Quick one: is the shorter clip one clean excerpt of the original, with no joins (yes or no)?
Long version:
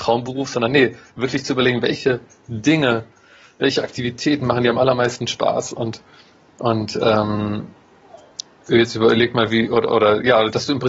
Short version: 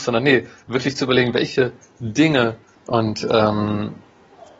no